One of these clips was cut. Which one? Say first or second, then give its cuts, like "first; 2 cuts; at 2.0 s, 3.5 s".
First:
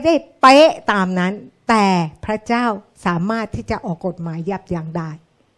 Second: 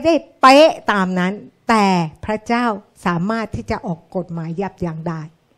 first; 1 cut; at 4.0 s